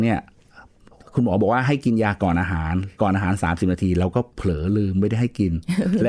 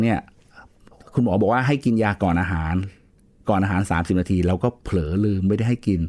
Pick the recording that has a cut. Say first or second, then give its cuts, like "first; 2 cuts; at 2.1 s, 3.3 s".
first; 1 cut; at 2.9 s